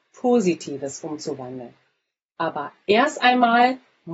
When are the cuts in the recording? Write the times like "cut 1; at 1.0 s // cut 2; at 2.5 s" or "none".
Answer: none